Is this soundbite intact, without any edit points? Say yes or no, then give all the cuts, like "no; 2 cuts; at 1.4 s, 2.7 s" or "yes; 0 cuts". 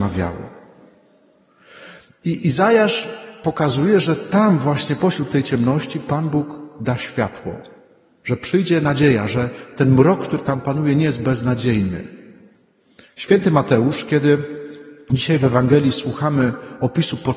yes; 0 cuts